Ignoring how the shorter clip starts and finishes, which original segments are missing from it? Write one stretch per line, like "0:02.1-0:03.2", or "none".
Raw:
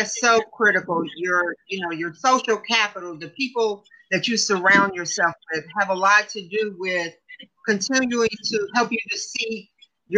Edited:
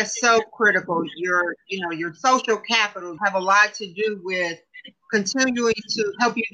0:03.2-0:05.7